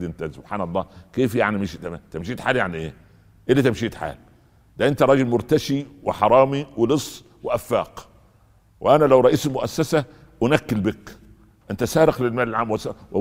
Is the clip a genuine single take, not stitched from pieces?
yes; 0 cuts

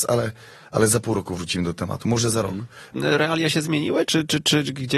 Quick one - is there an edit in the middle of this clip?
yes; 2 cuts; at 2.9 s, 4.1 s

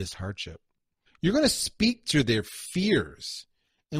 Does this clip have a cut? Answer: yes; 1 cut; at 1.1 s

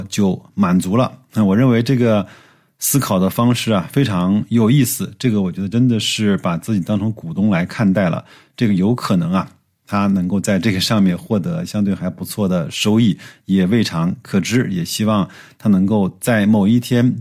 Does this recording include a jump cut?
no; 0 cuts

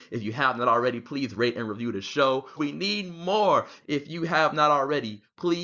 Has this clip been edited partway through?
yes; 2 cuts; at 2.6 s, 3.8 s

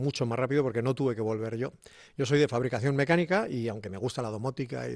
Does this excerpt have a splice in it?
no; 0 cuts

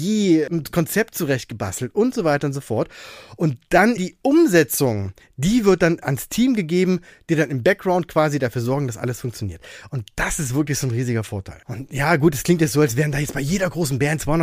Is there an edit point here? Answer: yes; 1 cut; at 4.0 s

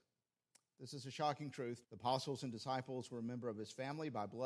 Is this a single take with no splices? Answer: no; 1 cut; at 1.8 s

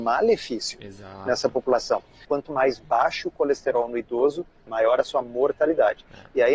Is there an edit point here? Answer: yes; 2 cuts; at 2.2 s, 4.7 s

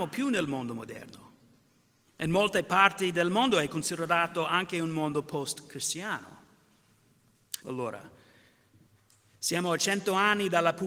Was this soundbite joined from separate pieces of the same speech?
yes; 2 cuts; at 2.1 s, 7.6 s

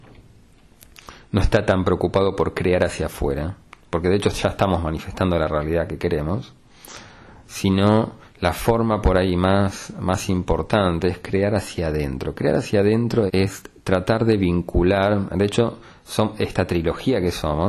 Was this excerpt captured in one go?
no; 1 cut; at 13.3 s

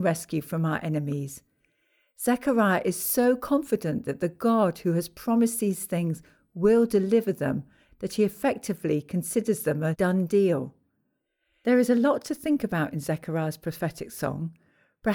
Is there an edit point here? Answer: no; 0 cuts

